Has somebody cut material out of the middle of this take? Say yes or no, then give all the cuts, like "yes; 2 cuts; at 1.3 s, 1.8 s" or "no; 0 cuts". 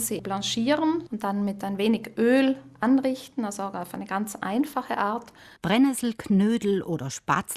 yes; 2 cuts; at 1.1 s, 5.6 s